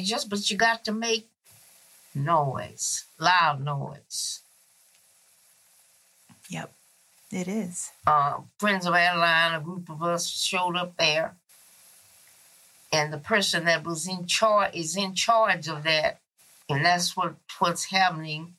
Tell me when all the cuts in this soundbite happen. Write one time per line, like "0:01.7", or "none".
0:07.2
0:16.6